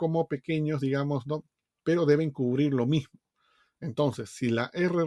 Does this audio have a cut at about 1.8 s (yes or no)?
yes